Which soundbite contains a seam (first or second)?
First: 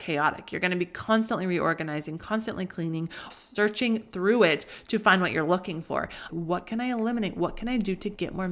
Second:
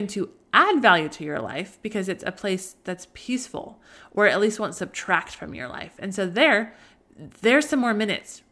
first